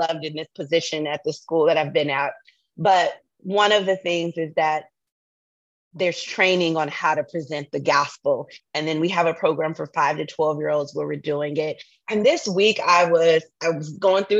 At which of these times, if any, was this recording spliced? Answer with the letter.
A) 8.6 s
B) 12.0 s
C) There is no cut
A